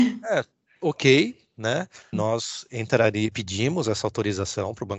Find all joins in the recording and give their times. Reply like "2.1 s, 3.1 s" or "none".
2.1 s, 3.3 s